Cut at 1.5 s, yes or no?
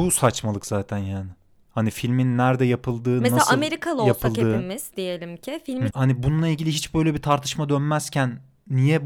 no